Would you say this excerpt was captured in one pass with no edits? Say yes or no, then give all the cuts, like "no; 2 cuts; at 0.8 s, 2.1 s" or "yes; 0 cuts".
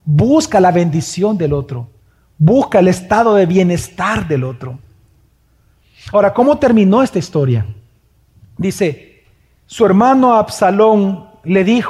yes; 0 cuts